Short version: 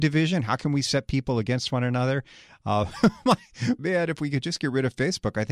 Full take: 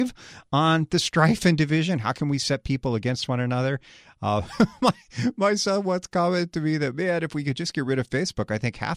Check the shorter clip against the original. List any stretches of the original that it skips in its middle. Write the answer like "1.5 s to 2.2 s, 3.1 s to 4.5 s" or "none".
5.4 s to 6.9 s